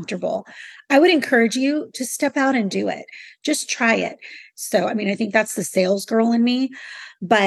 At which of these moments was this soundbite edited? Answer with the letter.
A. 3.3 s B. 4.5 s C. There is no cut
B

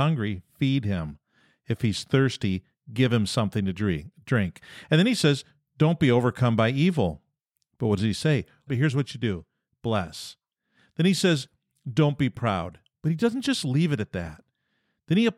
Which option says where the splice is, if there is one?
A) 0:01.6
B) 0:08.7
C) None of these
B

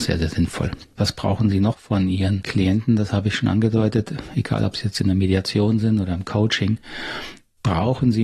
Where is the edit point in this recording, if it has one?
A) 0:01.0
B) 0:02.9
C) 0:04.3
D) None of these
A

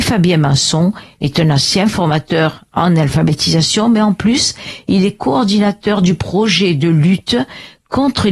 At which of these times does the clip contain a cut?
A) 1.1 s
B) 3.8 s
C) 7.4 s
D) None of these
D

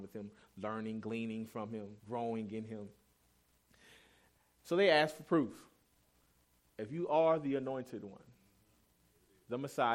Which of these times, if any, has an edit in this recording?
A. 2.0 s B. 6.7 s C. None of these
A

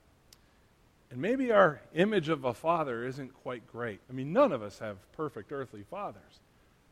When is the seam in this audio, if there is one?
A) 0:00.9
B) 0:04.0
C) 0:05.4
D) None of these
B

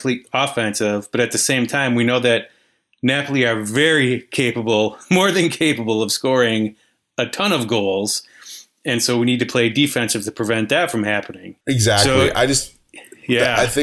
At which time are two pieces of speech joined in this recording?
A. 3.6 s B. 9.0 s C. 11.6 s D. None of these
C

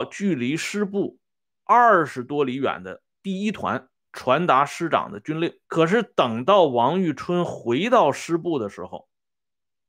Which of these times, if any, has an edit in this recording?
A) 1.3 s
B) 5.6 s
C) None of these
B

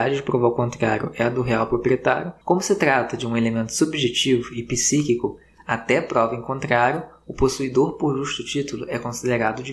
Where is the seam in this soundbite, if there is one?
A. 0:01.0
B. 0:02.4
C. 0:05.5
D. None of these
B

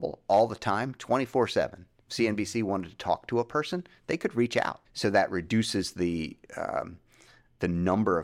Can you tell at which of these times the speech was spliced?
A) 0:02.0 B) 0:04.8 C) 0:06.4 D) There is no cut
B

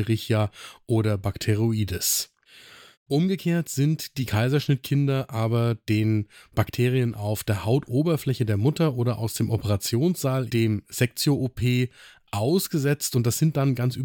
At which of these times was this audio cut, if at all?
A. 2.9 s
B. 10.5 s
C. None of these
B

